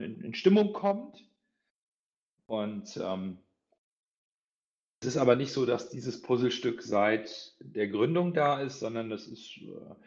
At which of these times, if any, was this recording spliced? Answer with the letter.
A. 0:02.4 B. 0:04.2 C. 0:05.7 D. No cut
A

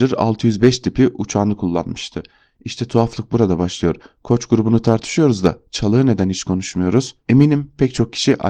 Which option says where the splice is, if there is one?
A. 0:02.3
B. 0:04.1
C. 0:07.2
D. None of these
C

